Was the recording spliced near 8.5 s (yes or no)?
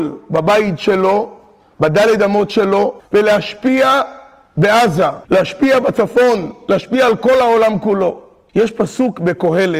yes